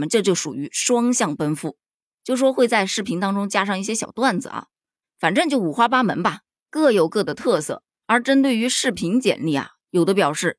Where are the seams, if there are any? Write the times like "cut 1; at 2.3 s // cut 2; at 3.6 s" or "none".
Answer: cut 1; at 5.0 s